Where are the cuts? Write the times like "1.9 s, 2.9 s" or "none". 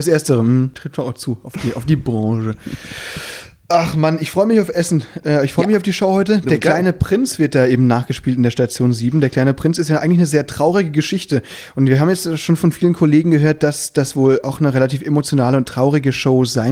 none

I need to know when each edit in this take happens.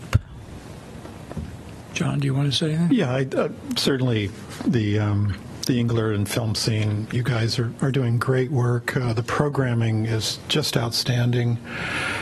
none

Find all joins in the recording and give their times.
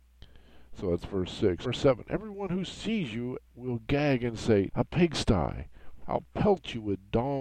1.6 s, 4.7 s, 6.0 s

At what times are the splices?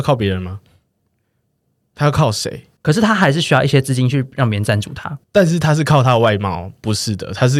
2.8 s, 5.2 s

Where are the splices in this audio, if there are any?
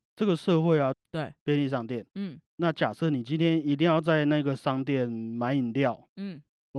0.9 s

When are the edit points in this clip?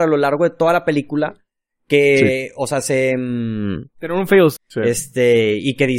4.6 s

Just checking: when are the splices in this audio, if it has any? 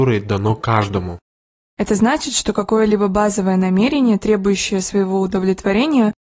1.7 s

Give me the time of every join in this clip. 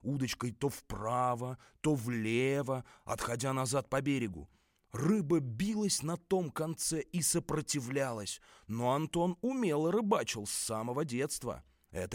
none

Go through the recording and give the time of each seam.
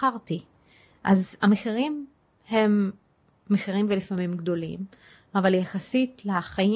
none

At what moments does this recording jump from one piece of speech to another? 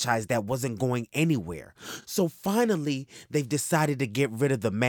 none

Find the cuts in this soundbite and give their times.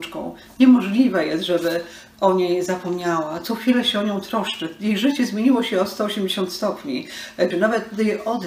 7.5 s

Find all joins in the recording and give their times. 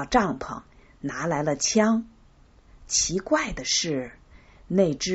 2.7 s

